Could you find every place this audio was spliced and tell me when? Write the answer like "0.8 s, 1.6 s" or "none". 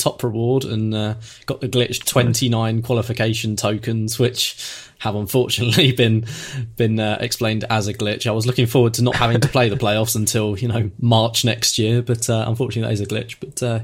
none